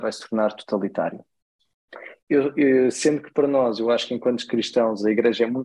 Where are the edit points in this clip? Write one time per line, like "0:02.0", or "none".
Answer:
0:02.2